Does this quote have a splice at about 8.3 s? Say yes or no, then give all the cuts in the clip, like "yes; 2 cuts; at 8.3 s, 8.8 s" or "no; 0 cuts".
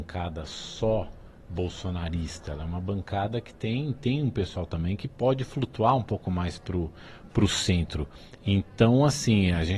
no; 0 cuts